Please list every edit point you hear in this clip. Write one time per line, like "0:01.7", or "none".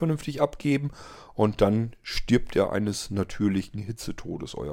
none